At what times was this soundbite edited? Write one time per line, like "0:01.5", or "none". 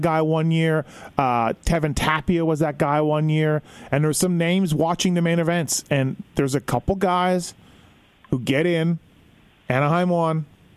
none